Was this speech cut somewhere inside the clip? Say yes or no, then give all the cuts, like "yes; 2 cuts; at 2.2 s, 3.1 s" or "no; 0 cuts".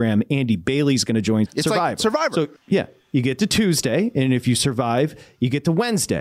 yes; 2 cuts; at 1.5 s, 2.6 s